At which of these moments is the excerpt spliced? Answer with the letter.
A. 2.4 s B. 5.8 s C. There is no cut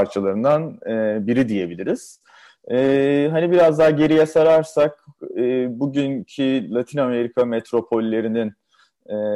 C